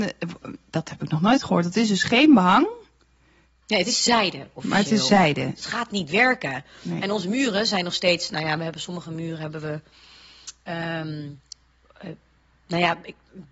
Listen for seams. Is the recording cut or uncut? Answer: cut